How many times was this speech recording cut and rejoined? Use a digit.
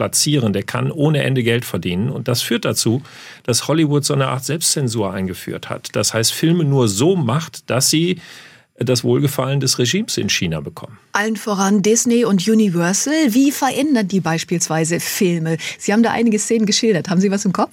0